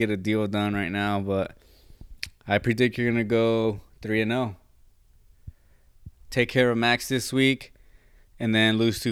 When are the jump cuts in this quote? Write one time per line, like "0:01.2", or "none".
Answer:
0:06.2